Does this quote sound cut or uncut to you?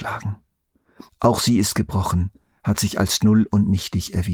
cut